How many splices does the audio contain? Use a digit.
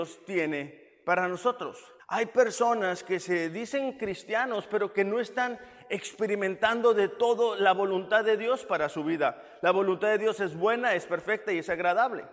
1